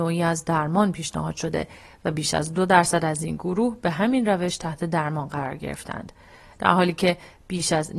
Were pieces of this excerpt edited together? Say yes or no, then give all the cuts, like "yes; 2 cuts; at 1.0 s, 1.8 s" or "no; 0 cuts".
no; 0 cuts